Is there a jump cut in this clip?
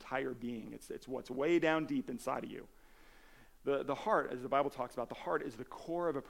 yes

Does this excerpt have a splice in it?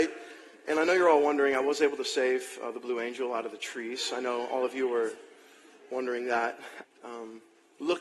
yes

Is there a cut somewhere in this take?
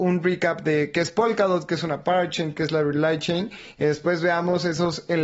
no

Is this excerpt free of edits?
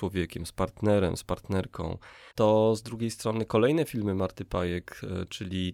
no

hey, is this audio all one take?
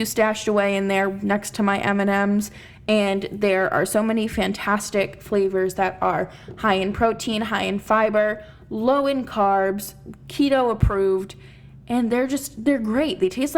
yes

